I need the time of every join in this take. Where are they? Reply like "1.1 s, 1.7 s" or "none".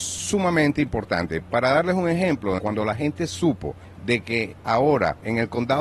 2.6 s